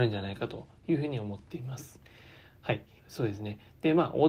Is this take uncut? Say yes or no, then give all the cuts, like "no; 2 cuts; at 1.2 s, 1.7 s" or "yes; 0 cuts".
no; 1 cut; at 3.0 s